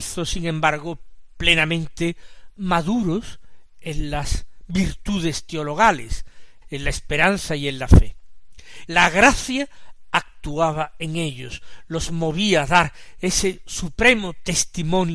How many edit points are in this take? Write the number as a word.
two